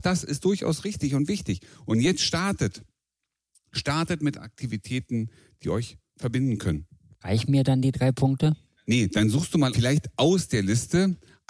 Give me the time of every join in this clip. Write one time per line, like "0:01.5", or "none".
0:07.2